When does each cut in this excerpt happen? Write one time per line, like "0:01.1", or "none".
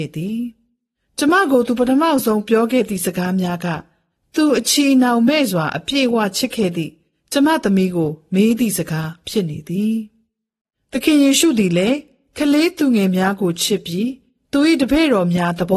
none